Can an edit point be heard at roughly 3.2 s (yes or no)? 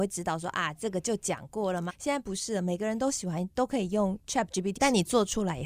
no